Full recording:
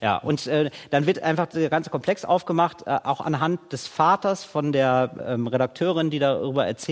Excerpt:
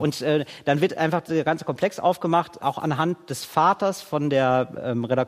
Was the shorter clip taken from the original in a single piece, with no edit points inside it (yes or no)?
no